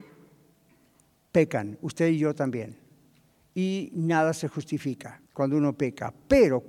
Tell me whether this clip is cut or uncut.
cut